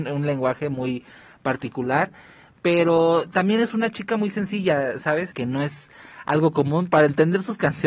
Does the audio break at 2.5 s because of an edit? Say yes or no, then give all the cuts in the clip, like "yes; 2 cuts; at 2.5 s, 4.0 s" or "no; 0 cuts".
no; 1 cut; at 5.3 s